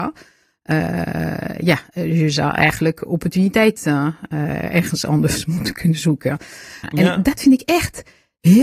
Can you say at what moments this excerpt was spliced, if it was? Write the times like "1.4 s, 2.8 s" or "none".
6.8 s